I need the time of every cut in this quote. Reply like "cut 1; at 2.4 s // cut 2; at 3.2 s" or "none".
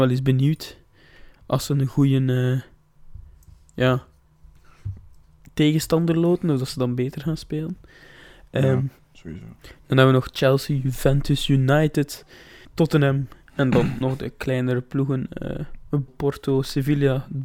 cut 1; at 12.6 s // cut 2; at 16.1 s